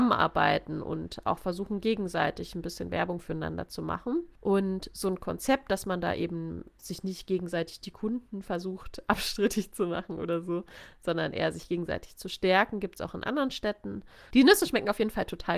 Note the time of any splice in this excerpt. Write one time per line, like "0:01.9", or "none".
0:14.3